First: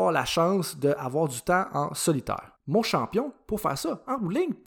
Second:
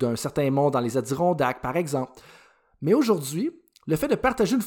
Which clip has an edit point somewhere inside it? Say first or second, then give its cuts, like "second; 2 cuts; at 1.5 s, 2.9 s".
first; 1 cut; at 2.6 s